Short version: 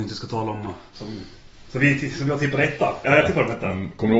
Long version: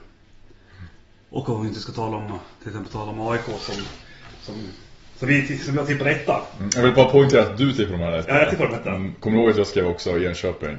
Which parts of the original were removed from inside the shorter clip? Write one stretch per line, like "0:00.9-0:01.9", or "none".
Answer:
0:02.6-0:04.4
0:06.5-0:08.3